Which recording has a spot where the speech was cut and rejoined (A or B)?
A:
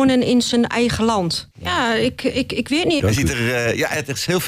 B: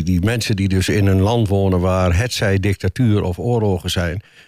A